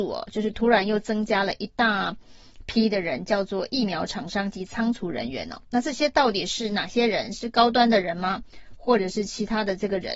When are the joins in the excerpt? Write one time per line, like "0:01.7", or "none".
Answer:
none